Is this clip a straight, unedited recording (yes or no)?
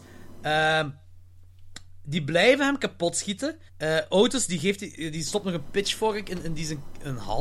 no